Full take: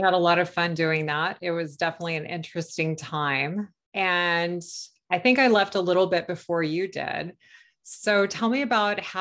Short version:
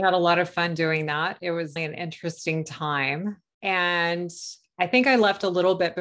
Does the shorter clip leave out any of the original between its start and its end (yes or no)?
yes